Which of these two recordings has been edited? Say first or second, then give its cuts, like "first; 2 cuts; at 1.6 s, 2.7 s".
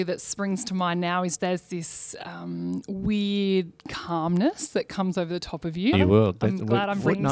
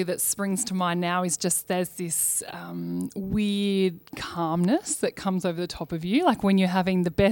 first; 2 cuts; at 1.4 s, 5.9 s